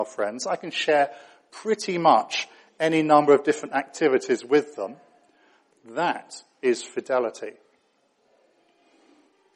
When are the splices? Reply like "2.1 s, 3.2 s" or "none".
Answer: 5.7 s